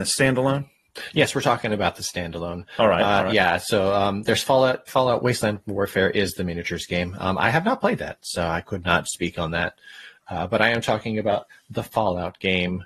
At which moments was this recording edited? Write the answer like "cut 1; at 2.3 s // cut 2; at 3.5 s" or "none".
cut 1; at 4.9 s